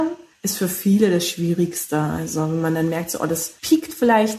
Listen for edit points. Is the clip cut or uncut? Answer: uncut